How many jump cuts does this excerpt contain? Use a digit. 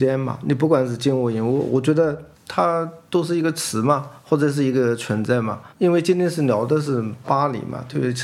1